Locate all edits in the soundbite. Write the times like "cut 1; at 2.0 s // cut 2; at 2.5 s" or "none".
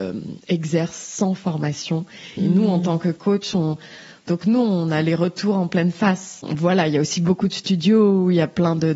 cut 1; at 2.4 s // cut 2; at 4.2 s